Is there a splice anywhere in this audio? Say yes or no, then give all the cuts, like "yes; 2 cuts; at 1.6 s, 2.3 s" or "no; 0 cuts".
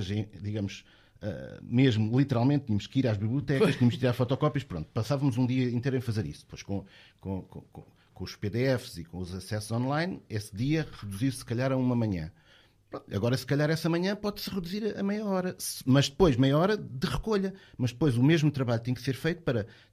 no; 0 cuts